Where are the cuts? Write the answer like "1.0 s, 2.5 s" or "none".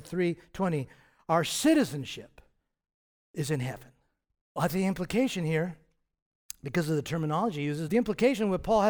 4.4 s, 7.9 s